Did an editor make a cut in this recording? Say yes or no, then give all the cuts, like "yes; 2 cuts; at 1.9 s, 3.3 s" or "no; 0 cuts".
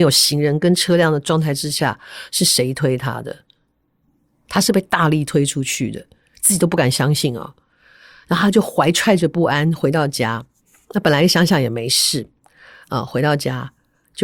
no; 0 cuts